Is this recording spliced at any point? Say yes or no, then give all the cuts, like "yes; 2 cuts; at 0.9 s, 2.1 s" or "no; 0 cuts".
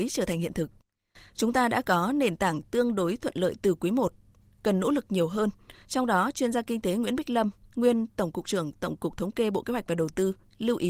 no; 0 cuts